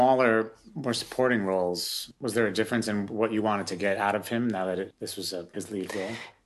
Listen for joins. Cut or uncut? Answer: uncut